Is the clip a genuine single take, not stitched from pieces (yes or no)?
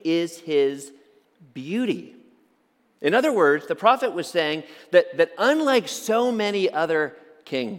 yes